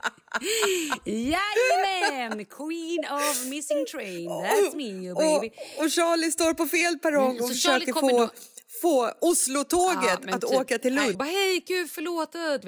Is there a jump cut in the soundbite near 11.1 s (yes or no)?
yes